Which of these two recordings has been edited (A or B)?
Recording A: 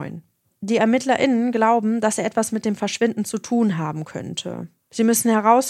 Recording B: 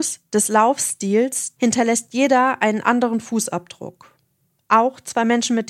B